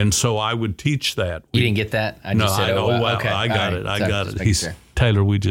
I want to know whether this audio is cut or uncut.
uncut